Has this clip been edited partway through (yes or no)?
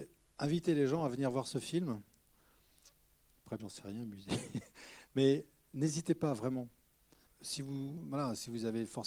yes